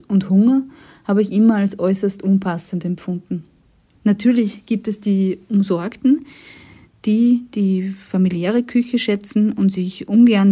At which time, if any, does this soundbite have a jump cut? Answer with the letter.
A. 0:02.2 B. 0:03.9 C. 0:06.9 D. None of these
B